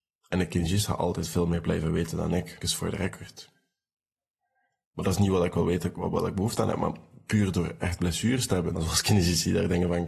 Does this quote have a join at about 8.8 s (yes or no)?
yes